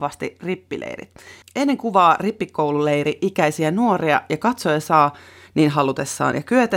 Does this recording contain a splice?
yes; 1 cut; at 1.4 s

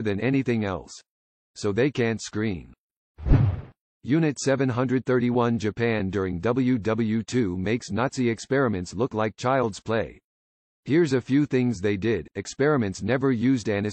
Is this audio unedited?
yes; 0 cuts

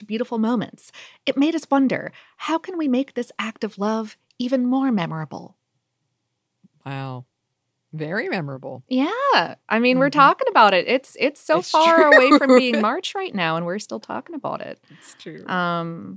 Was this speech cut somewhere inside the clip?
no; 0 cuts

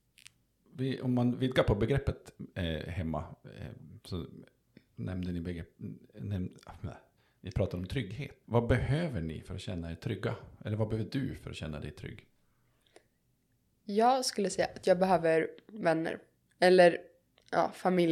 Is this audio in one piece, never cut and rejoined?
no; 1 cut; at 8.4 s

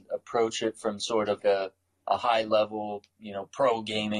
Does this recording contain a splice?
yes; 1 cut; at 1.4 s

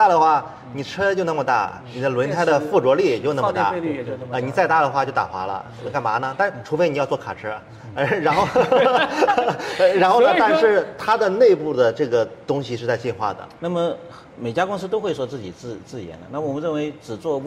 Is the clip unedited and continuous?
no; 1 cut; at 13.6 s

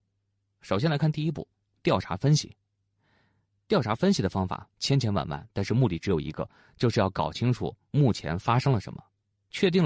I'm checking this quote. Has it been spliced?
no; 0 cuts

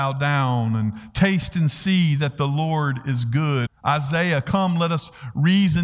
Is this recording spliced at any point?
yes; 1 cut; at 3.7 s

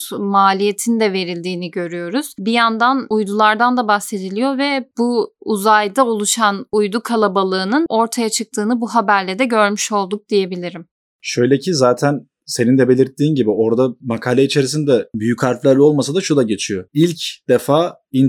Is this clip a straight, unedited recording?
yes; 0 cuts

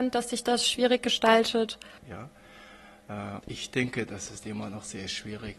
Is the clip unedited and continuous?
no; 2 cuts; at 2.0 s, 3.4 s

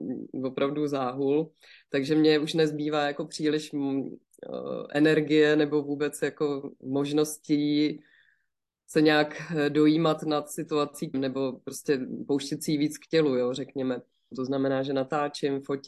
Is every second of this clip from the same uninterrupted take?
no; 2 cuts; at 11.1 s, 14.3 s

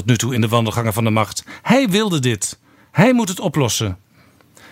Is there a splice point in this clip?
no; 0 cuts

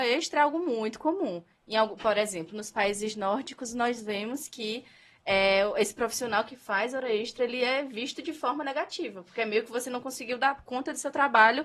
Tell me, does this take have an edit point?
no; 0 cuts

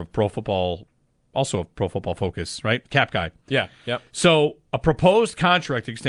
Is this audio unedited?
yes; 0 cuts

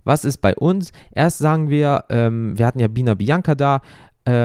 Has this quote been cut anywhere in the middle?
no; 0 cuts

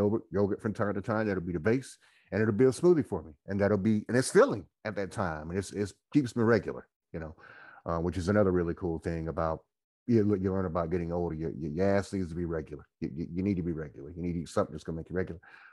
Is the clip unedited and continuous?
yes; 0 cuts

